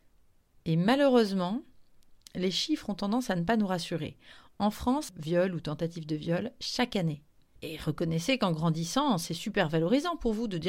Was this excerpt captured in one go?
no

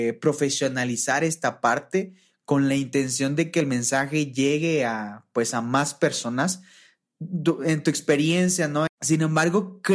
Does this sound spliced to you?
yes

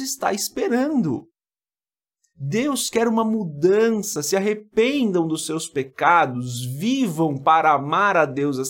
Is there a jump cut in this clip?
no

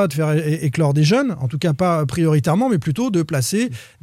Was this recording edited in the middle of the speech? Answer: no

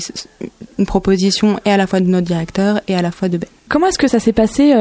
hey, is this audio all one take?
no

